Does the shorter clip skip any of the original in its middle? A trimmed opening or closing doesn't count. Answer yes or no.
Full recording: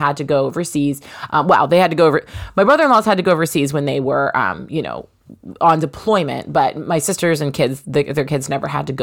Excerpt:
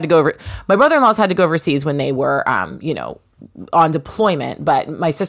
no